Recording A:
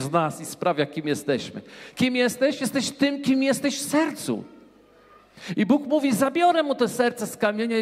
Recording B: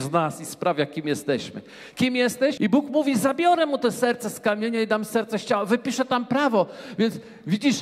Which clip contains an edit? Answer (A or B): B